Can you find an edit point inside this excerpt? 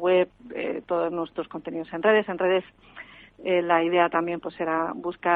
no; 0 cuts

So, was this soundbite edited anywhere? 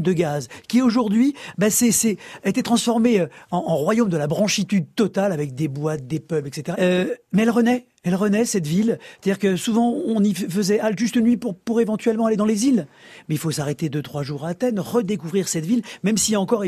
yes; 1 cut; at 6.7 s

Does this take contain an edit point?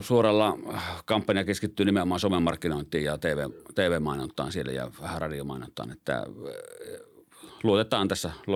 no; 0 cuts

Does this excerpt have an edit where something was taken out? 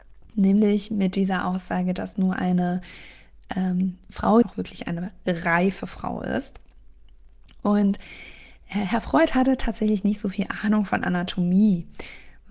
yes; 1 cut; at 4.4 s

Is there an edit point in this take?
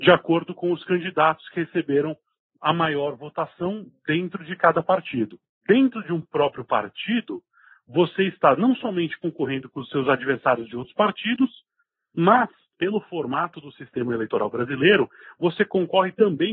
yes; 1 cut; at 5.6 s

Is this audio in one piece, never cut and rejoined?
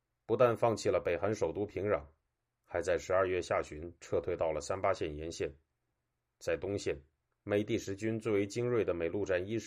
yes; 0 cuts

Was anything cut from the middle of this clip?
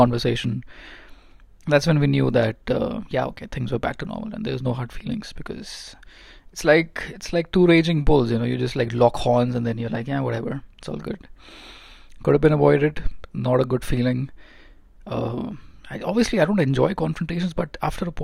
no; 0 cuts

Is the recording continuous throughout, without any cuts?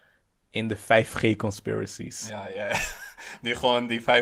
yes; 0 cuts

